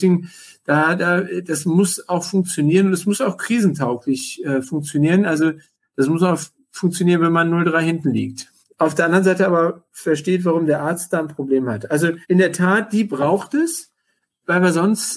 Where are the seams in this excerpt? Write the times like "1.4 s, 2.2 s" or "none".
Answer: 8.6 s, 12.2 s